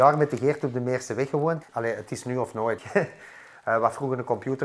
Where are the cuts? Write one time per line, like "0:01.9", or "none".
0:01.7
0:02.8